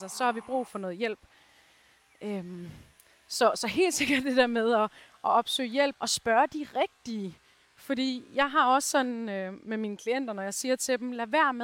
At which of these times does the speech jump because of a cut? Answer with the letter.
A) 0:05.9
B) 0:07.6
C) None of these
A